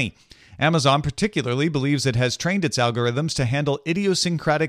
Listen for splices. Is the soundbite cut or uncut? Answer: uncut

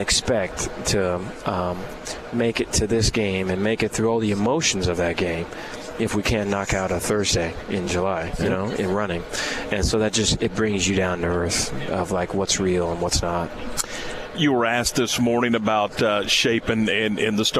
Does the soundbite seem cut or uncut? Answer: uncut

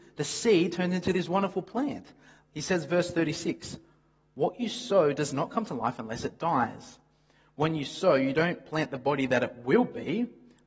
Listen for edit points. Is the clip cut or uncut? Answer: cut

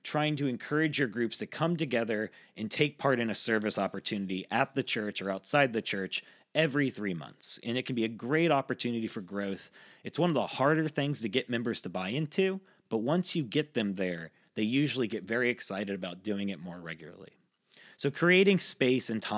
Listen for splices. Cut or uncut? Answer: uncut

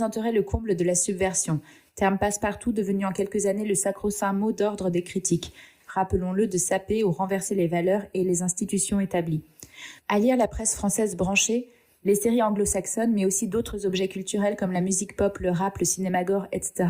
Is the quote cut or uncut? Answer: cut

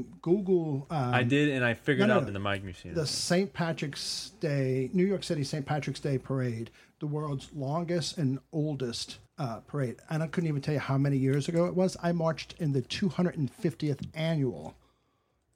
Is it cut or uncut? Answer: cut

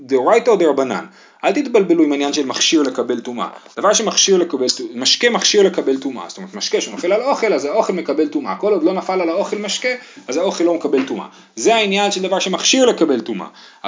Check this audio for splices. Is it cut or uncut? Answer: uncut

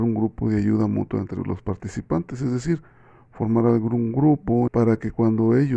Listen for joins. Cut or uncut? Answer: cut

